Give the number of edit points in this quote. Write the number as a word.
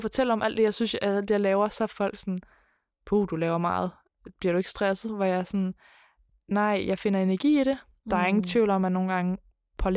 zero